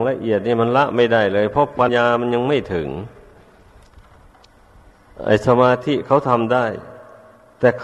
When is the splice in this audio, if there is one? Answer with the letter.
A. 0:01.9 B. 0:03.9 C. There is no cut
A